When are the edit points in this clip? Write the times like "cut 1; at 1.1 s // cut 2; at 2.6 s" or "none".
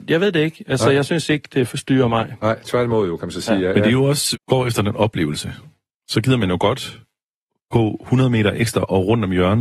cut 1; at 4.3 s